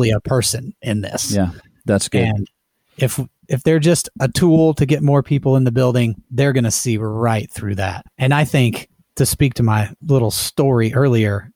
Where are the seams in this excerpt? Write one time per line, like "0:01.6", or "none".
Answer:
none